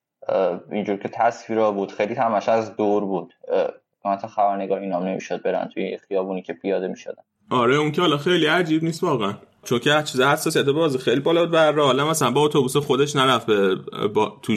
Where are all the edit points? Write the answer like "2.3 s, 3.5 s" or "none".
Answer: 9.6 s